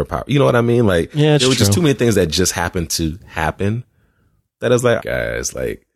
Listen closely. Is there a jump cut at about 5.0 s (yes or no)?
yes